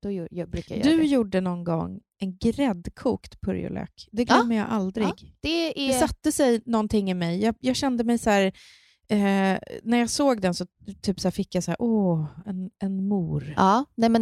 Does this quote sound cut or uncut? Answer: uncut